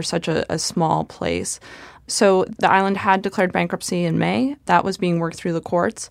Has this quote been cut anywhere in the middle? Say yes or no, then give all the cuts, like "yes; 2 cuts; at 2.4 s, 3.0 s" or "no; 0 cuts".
no; 0 cuts